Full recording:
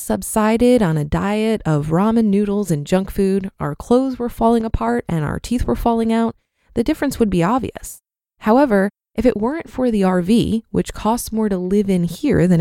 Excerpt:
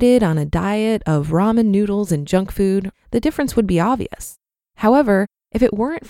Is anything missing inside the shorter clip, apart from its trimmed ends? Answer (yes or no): yes